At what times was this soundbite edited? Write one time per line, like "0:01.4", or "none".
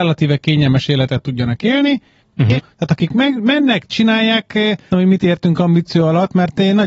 0:02.6
0:04.9